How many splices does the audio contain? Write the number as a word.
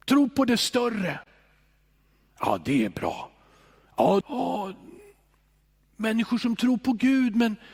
one